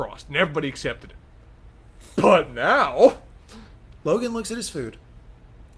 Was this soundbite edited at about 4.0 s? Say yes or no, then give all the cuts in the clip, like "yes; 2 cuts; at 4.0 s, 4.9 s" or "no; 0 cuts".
yes; 1 cut; at 4.0 s